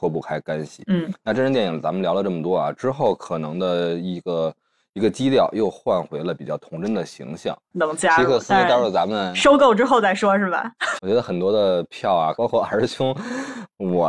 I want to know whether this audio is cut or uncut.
cut